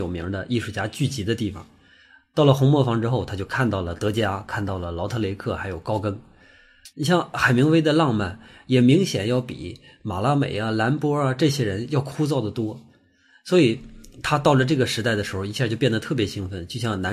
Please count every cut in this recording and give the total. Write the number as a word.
one